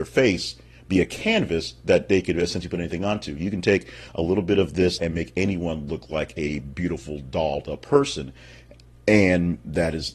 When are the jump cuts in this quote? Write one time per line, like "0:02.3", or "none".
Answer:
0:05.0